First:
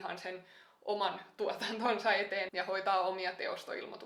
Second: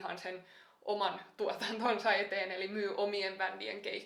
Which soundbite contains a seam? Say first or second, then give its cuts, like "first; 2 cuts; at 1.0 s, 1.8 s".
first; 1 cut; at 2.5 s